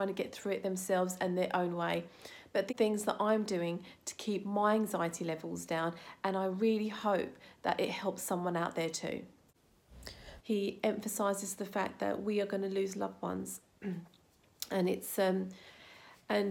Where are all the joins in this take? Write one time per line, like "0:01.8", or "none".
0:10.4